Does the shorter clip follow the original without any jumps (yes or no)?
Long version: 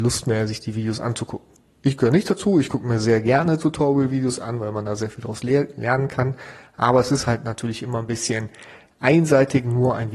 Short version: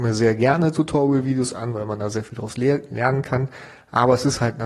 yes